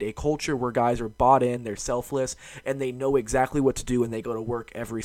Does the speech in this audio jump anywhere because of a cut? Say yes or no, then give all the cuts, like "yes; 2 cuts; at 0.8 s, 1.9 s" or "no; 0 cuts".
no; 0 cuts